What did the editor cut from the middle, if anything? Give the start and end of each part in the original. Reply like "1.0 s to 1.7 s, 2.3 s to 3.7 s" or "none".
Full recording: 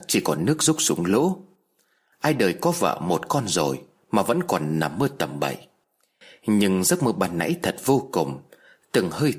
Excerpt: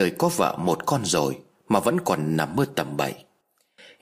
none